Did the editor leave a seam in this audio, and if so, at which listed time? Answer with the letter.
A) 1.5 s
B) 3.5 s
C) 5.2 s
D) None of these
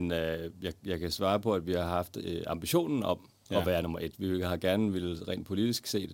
D